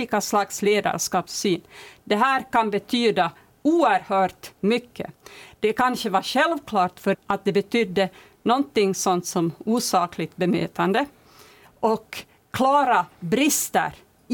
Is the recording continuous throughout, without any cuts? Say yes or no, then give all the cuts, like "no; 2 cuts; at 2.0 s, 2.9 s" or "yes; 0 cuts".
no; 1 cut; at 7.1 s